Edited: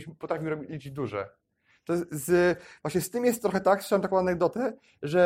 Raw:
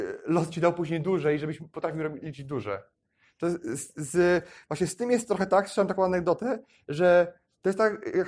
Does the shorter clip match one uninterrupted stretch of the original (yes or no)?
no